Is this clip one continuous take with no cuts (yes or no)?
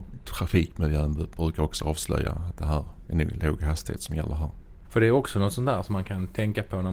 no